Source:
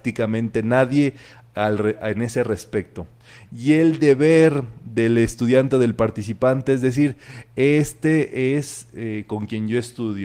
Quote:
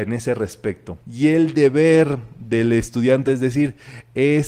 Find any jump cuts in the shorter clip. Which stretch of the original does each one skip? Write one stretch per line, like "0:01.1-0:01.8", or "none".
0:03.1-0:03.5
0:05.7-0:06.7